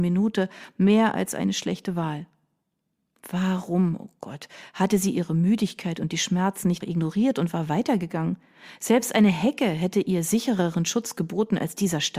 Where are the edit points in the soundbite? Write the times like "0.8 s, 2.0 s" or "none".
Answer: 6.8 s